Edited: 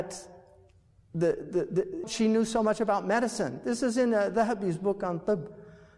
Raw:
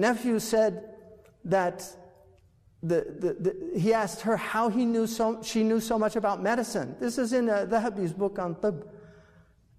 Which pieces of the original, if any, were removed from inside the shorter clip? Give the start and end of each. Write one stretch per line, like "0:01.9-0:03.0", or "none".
0:03.7-0:05.4